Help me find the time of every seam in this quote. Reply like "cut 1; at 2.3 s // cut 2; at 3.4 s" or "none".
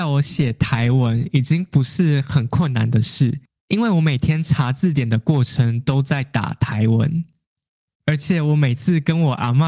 none